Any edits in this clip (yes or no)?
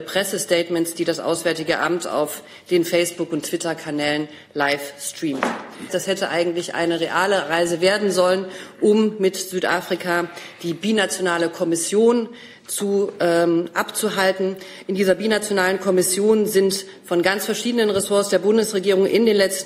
yes